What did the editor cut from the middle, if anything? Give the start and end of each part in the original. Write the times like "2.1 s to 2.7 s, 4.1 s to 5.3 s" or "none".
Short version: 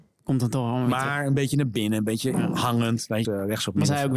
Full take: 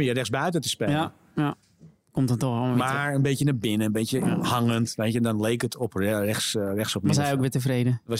5.1 s to 6.5 s